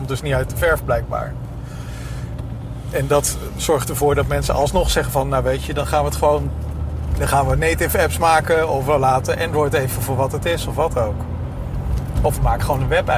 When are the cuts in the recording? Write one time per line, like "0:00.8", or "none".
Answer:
none

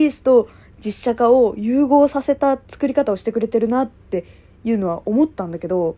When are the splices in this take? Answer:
none

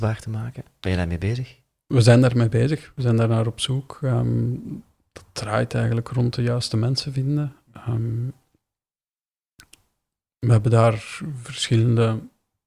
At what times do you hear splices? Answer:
none

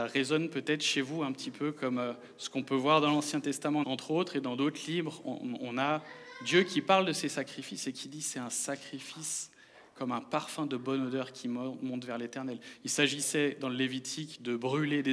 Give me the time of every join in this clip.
0:03.8

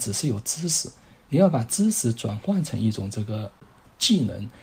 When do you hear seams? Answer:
none

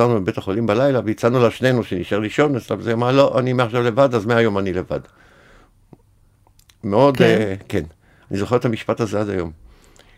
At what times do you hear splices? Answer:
none

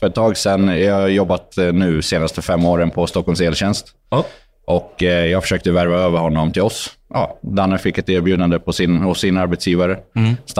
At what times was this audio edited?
none

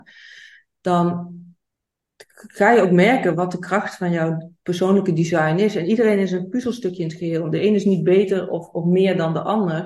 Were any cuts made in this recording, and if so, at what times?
none

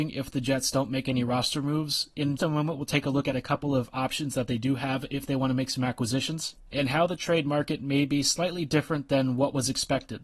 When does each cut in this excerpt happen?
0:02.4

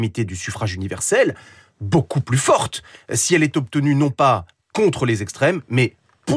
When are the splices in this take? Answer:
none

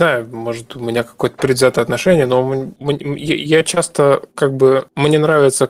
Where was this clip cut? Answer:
none

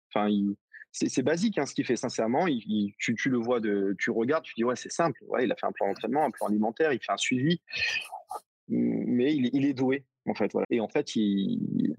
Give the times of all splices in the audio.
0:10.6

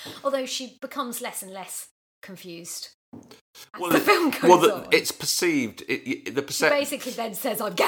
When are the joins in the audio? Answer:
none

